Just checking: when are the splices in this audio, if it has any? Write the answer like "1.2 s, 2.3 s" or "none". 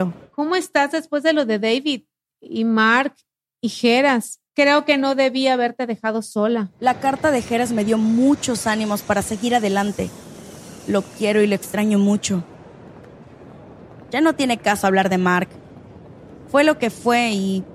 4.5 s